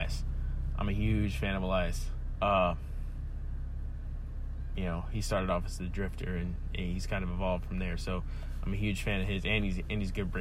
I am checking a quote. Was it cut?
yes; 1 cut; at 2.3 s

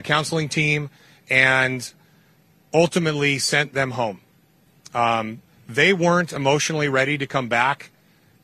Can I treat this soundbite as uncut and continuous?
yes; 0 cuts

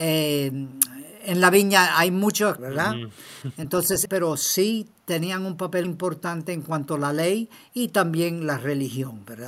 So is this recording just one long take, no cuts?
no; 3 cuts; at 2.6 s, 4.1 s, 5.8 s

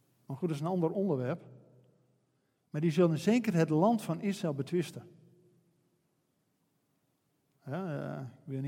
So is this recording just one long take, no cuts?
yes; 0 cuts

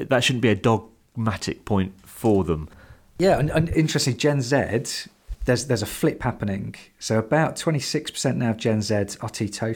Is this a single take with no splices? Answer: no; 1 cut; at 5.3 s

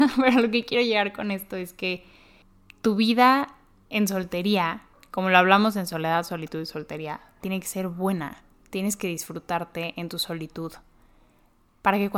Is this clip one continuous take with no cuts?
yes; 0 cuts

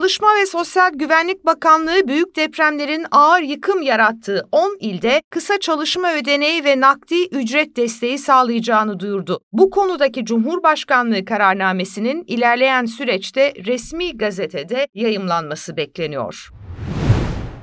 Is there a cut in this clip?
no; 0 cuts

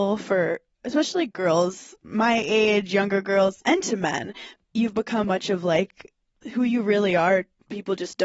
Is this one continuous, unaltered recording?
no; 2 cuts; at 3.6 s, 5.2 s

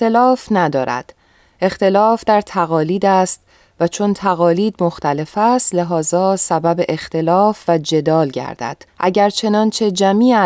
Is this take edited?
yes; 1 cut; at 8.9 s

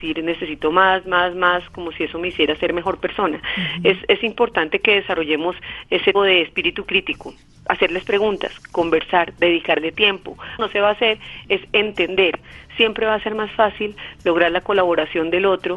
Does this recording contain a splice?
yes; 2 cuts; at 6.1 s, 10.6 s

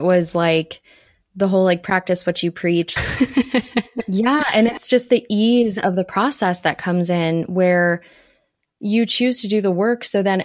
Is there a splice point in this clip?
yes; 1 cut; at 3.0 s

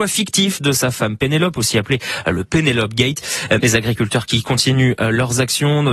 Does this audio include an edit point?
yes; 1 cut; at 3.6 s

